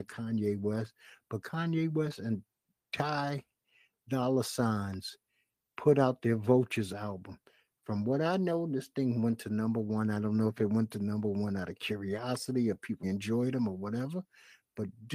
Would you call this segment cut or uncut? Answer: cut